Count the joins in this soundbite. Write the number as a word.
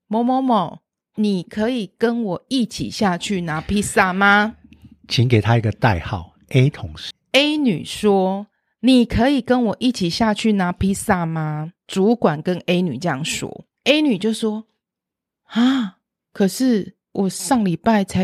one